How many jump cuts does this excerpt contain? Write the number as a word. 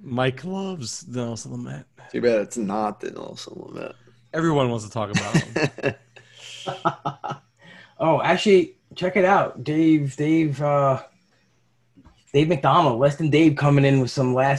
one